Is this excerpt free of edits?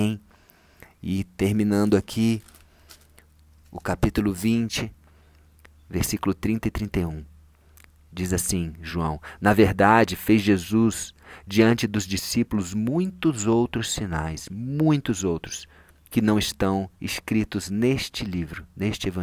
yes; 0 cuts

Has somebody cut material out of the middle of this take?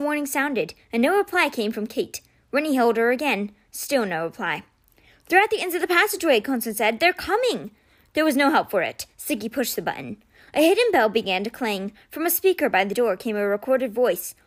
no; 0 cuts

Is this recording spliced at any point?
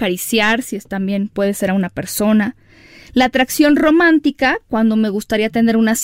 no; 0 cuts

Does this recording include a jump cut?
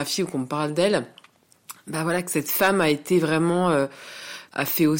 no; 0 cuts

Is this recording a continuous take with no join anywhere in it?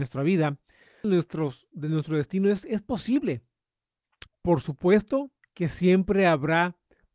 no; 2 cuts; at 1.0 s, 4.3 s

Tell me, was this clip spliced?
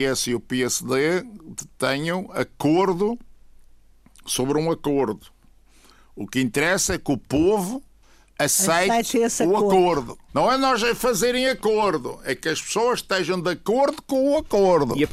yes; 1 cut; at 10.3 s

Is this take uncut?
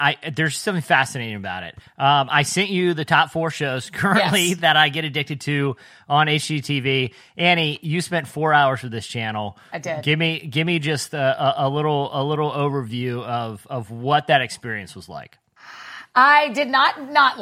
yes; 0 cuts

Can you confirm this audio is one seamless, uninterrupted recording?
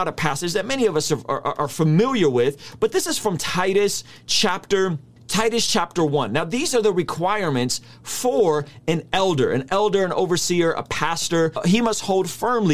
yes; 0 cuts

